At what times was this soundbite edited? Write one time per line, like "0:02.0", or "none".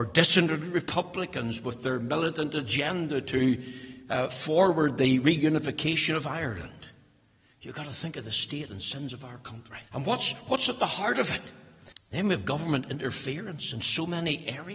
0:09.9
0:11.9